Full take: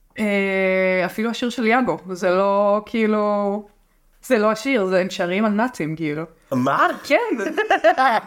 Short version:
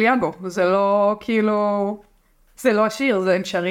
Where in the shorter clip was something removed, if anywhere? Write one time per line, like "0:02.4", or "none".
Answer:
none

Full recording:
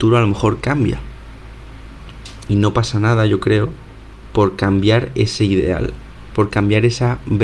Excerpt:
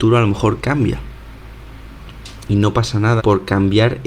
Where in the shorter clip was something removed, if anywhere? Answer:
0:03.2

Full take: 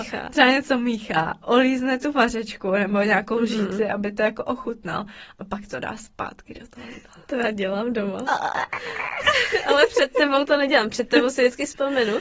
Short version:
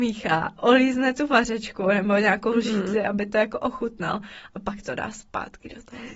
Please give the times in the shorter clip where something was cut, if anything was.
none

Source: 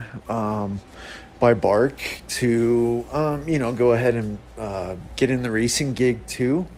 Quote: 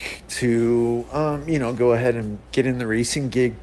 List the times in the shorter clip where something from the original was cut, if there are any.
0:02.5

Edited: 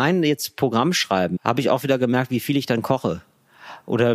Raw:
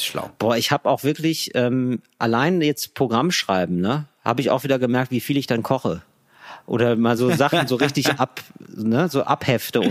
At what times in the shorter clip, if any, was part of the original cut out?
0:01.4

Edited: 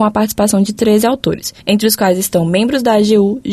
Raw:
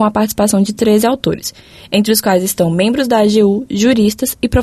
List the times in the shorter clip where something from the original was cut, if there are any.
0:01.6

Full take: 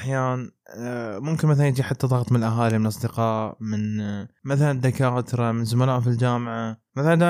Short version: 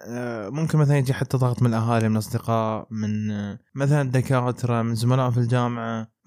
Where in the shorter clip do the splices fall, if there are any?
none

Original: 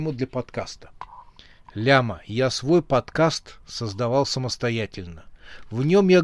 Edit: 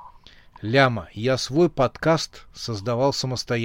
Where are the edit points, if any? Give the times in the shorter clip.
none

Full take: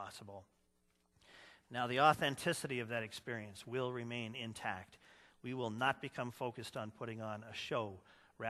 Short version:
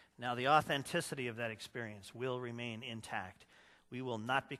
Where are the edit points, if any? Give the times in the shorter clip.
none

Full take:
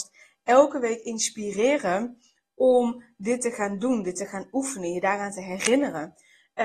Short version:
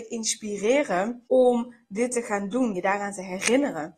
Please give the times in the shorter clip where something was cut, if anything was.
0:01.3
0:02.7

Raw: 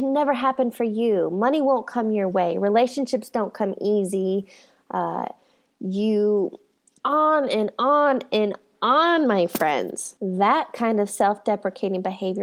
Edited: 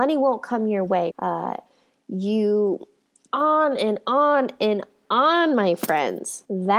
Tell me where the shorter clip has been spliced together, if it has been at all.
0:01.1

